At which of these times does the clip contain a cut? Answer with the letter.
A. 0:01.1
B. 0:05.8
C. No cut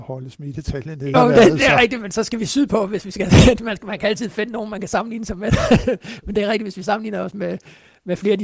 A